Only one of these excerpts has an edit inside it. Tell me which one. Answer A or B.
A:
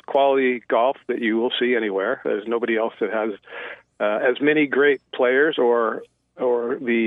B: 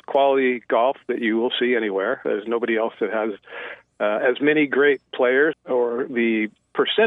B